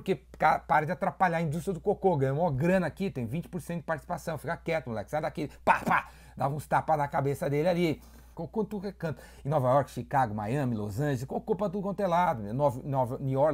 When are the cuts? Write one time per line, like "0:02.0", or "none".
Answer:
0:08.3